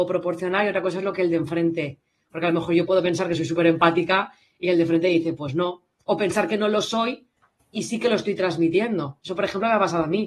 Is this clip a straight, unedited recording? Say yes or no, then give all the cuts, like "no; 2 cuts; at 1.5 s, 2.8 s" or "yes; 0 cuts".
yes; 0 cuts